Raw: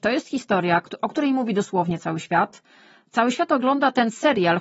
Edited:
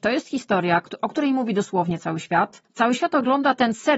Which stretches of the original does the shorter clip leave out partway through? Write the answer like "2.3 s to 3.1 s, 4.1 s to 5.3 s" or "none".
2.7 s to 3.0 s